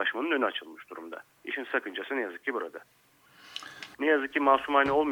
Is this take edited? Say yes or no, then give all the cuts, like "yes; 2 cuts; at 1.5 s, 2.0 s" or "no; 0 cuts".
yes; 1 cut; at 3.9 s